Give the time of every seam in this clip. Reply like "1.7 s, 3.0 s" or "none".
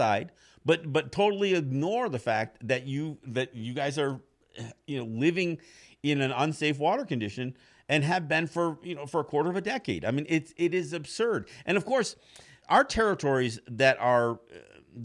12.6 s